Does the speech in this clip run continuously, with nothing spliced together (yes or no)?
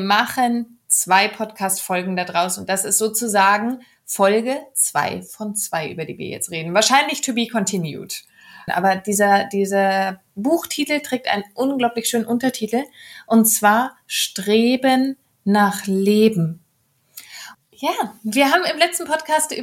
no